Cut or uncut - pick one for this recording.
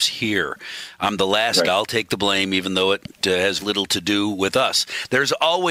cut